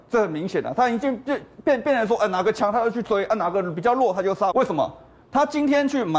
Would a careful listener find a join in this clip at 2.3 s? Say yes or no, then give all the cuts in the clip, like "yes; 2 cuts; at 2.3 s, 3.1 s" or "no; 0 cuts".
no; 1 cut; at 4.5 s